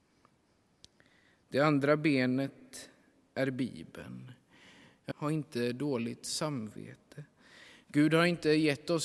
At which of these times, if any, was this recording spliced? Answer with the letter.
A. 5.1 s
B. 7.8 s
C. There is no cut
A